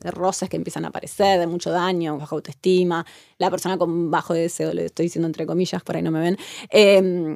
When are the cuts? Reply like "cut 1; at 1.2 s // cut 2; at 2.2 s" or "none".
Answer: cut 1; at 2.2 s